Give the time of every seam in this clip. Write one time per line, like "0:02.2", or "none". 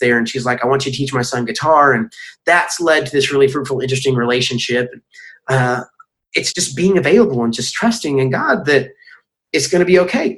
0:06.5

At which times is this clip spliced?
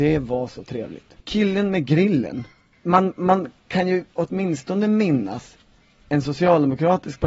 none

